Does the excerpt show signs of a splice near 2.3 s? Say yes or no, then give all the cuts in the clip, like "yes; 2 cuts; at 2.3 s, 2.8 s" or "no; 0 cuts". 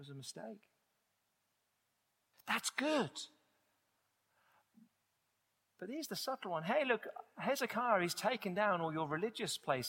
yes; 1 cut; at 2.3 s